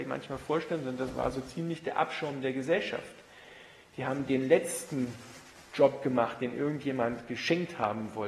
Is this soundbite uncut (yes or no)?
yes